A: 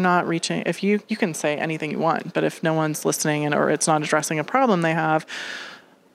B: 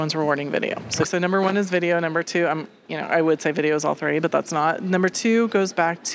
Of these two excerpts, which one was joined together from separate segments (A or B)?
B